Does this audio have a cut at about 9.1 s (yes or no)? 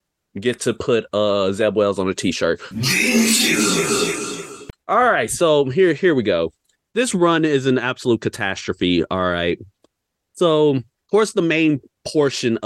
no